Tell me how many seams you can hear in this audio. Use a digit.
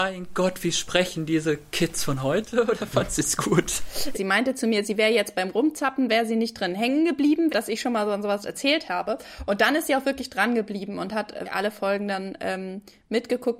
3